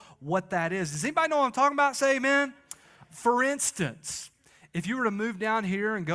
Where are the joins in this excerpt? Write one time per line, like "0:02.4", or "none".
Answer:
none